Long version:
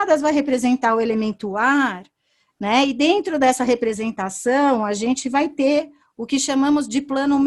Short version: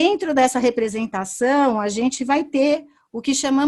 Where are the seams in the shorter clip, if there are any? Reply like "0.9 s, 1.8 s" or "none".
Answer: none